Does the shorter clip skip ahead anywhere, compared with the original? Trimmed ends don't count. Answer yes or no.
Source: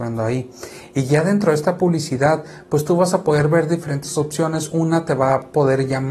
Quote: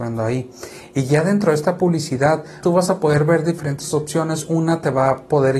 yes